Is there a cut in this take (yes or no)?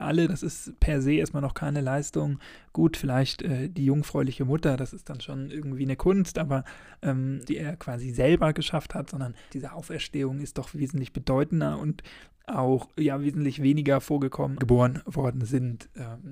yes